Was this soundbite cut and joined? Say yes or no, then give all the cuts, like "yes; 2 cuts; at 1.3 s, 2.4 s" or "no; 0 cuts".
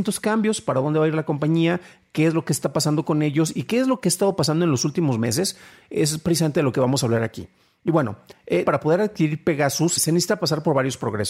yes; 2 cuts; at 8.6 s, 10.0 s